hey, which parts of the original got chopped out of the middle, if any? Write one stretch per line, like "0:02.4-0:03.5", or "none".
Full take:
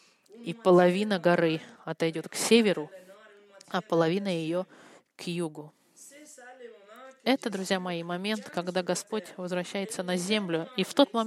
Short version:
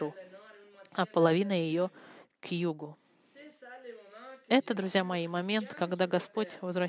none